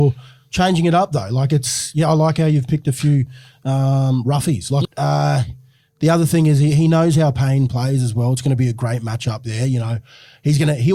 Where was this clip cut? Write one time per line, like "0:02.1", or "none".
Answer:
0:04.8